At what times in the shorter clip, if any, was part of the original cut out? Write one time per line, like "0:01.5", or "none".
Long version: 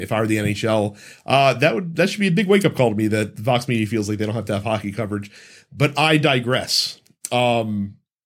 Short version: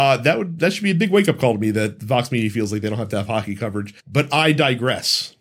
0:04.0